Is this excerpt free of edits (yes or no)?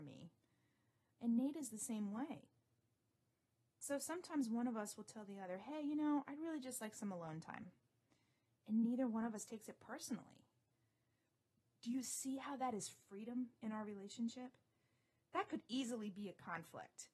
no